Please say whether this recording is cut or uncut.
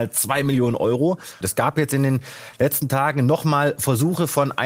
cut